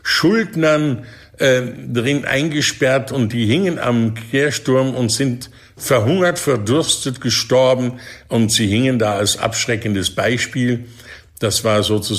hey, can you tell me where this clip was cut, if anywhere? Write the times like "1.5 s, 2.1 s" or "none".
none